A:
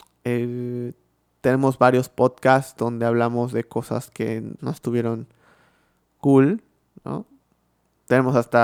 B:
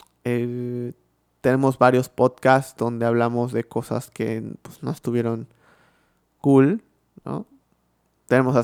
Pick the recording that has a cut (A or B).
A